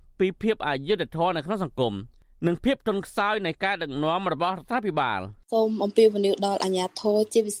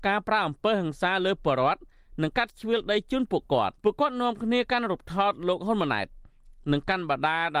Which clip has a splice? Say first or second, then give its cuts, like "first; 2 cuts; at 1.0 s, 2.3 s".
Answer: second; 1 cut; at 3.8 s